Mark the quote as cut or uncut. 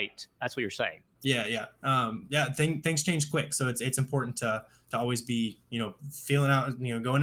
uncut